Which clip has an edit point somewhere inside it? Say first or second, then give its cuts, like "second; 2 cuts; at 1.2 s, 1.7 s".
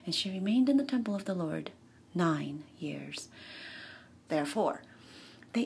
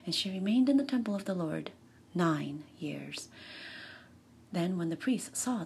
first; 1 cut; at 4.3 s